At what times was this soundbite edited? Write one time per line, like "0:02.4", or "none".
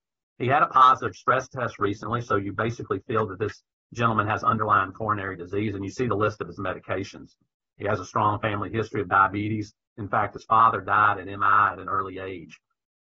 none